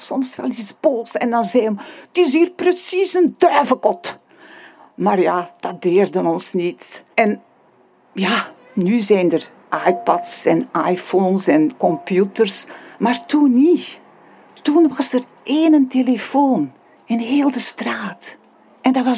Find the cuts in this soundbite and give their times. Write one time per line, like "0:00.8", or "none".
0:07.1